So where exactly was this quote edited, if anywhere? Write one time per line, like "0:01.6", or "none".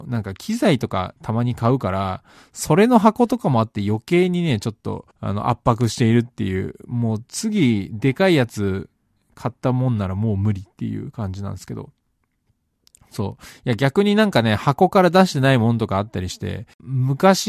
0:05.1